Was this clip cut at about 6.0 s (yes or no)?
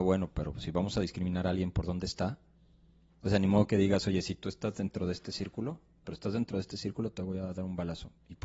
yes